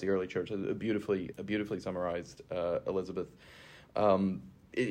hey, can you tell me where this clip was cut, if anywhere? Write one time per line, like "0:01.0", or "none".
0:01.3